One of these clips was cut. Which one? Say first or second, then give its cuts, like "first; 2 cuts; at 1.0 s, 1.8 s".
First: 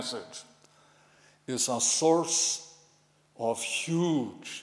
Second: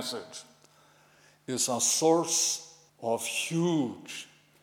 second; 1 cut; at 2.9 s